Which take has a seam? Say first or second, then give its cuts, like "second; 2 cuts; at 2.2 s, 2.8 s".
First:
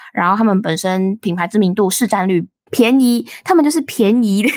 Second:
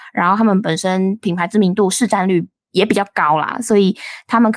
first; 1 cut; at 2.7 s